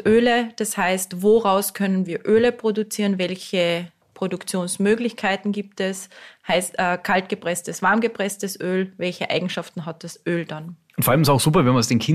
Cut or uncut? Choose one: uncut